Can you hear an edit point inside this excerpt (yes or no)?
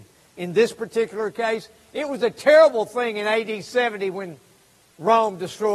no